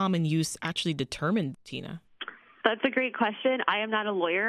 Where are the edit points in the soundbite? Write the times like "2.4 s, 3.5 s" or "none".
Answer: 1.5 s